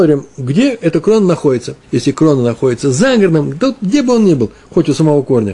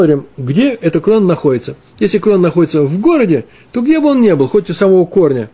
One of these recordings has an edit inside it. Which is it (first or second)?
first